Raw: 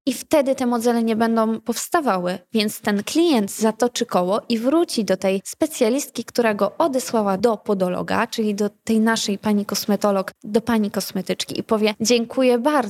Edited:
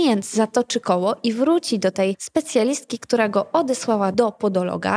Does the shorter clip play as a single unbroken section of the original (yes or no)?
yes